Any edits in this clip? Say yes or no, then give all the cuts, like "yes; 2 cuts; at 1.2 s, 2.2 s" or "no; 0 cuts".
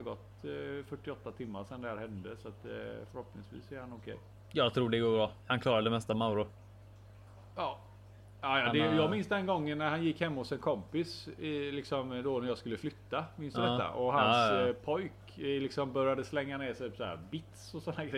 no; 0 cuts